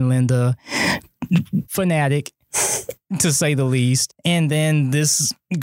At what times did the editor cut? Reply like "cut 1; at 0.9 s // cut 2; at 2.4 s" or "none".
cut 1; at 1.6 s // cut 2; at 4.1 s